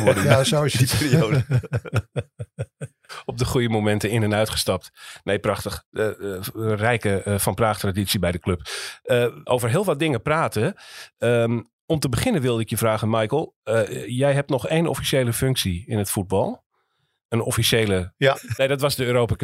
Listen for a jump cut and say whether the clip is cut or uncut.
cut